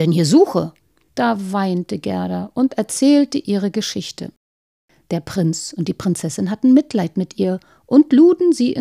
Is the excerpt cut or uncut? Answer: uncut